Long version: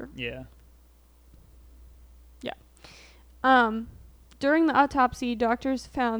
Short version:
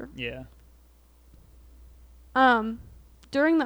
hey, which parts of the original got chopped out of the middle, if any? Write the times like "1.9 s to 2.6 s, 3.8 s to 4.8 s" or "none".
2.3 s to 3.4 s